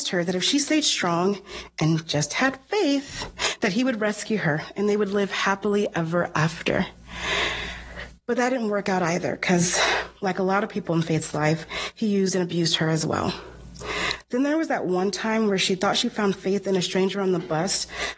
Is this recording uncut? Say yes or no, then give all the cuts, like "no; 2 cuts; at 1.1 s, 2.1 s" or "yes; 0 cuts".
yes; 0 cuts